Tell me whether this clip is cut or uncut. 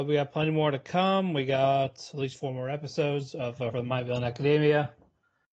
cut